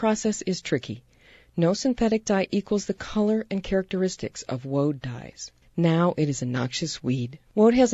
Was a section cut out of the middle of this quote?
yes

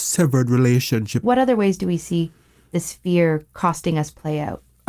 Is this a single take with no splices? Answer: no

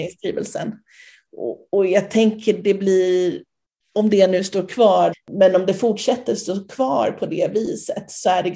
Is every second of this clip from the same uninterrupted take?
no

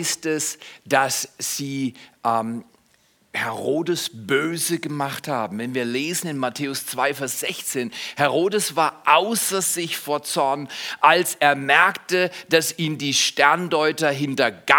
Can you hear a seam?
no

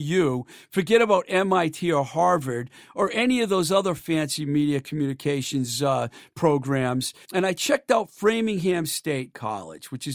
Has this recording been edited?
yes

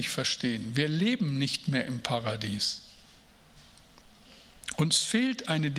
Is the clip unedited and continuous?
yes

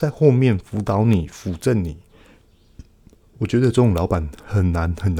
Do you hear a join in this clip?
no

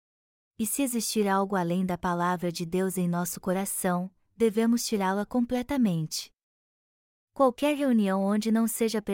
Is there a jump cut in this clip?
no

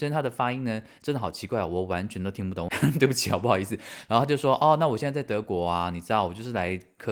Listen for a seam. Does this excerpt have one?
yes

